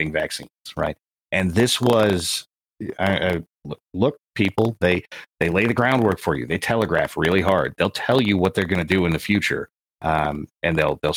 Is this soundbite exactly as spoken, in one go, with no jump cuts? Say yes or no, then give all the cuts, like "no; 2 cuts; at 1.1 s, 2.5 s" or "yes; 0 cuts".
yes; 0 cuts